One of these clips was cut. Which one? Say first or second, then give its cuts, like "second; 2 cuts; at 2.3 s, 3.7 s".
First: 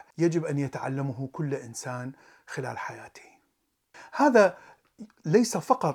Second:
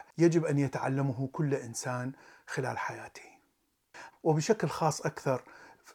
second; 1 cut; at 4.1 s